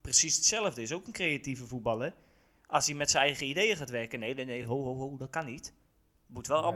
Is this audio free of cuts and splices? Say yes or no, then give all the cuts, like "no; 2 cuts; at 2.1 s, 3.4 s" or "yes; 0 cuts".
yes; 0 cuts